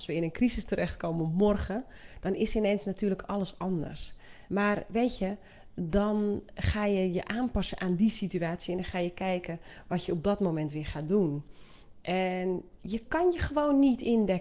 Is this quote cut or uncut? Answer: cut